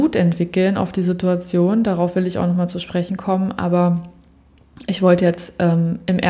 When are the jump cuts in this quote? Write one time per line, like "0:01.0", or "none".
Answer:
none

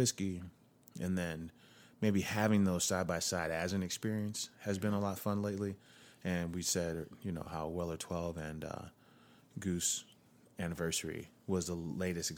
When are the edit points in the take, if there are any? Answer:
none

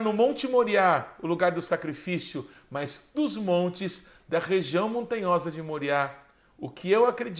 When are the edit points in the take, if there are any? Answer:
0:03.1

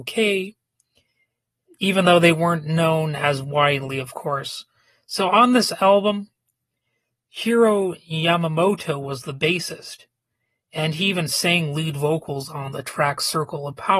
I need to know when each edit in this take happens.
none

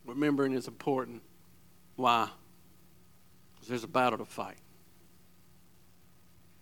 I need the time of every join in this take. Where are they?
none

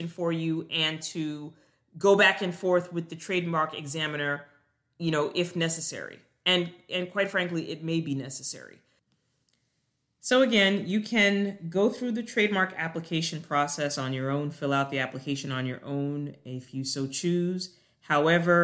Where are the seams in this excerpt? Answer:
none

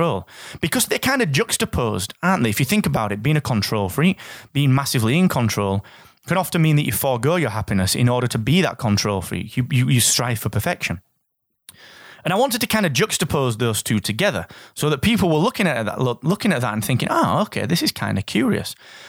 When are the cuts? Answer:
none

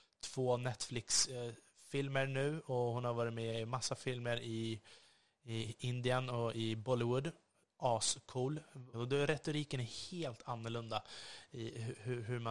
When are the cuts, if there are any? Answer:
0:08.9

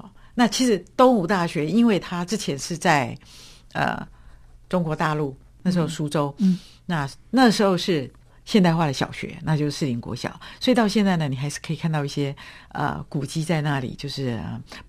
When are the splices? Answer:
0:08.2

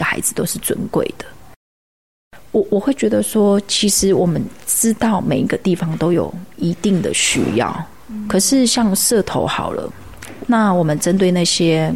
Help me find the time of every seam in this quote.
0:10.4

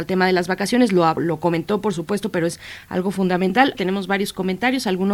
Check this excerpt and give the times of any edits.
0:01.2
0:03.7

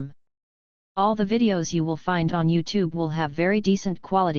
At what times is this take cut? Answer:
none

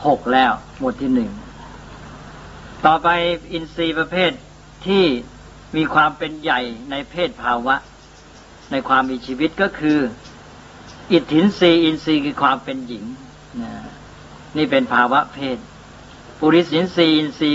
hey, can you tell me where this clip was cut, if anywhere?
none

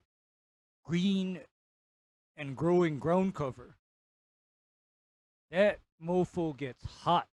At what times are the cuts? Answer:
0:05.3

